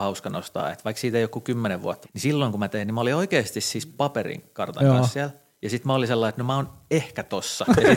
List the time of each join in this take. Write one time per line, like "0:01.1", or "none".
0:02.0